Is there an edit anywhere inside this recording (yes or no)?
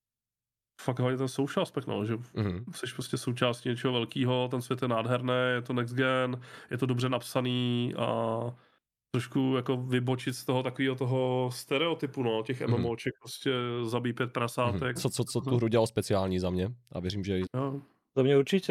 yes